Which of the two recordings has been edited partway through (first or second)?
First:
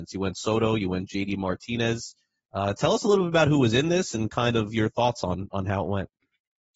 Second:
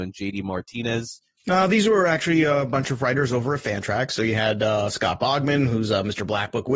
second